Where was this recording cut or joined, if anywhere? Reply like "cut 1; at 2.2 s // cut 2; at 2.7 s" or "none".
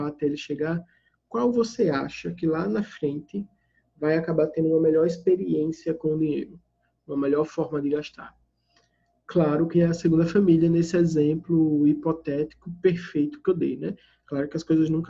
cut 1; at 9.7 s